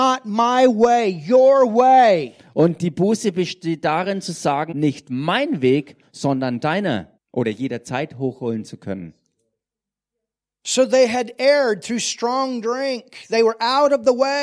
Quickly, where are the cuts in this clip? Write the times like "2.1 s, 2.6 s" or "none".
4.7 s, 7.2 s